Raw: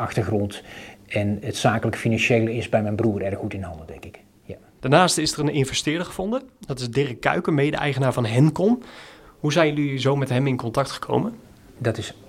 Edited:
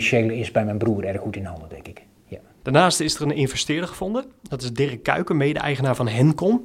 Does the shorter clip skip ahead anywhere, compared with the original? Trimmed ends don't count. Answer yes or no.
no